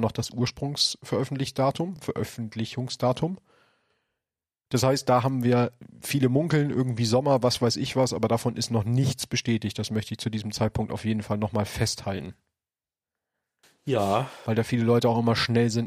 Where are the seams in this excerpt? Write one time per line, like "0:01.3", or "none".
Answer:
none